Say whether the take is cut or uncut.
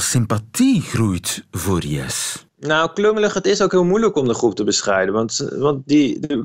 uncut